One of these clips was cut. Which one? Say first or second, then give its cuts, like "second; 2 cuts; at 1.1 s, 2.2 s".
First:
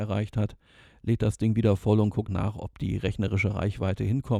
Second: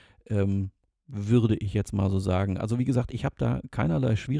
first; 1 cut; at 2.3 s